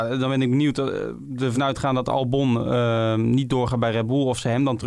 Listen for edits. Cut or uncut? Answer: uncut